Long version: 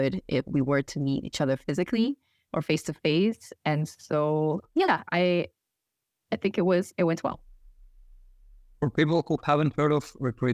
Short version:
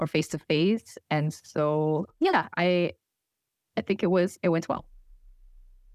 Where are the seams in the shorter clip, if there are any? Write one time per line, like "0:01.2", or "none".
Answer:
none